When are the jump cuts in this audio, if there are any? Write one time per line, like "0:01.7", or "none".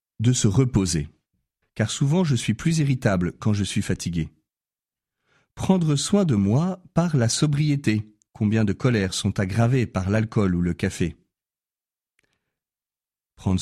0:01.6
0:08.3